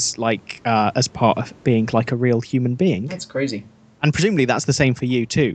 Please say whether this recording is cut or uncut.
uncut